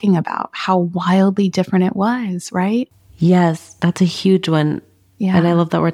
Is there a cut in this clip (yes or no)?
no